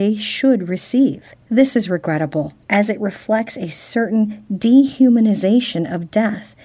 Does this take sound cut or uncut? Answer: cut